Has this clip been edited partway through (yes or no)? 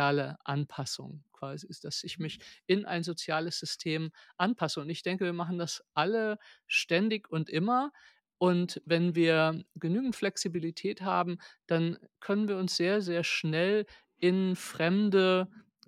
no